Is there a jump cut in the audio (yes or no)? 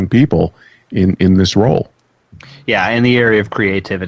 no